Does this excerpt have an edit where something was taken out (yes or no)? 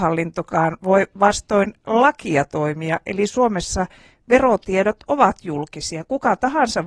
no